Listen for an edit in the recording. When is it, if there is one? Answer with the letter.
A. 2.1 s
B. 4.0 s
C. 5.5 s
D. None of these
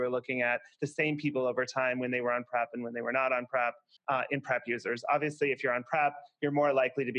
B